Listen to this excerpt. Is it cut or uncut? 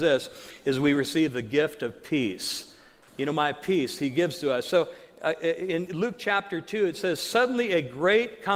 cut